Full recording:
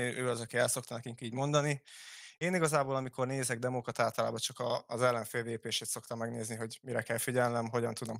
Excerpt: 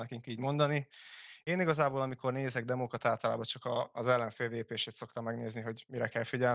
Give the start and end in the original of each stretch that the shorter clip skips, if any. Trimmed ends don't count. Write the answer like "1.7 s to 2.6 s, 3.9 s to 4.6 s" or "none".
none